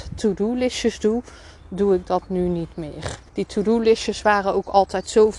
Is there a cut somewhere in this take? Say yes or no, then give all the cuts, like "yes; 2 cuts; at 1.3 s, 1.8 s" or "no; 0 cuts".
yes; 1 cut; at 3.3 s